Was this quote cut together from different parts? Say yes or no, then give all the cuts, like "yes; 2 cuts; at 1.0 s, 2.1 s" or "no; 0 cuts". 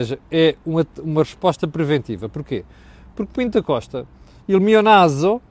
yes; 1 cut; at 4.4 s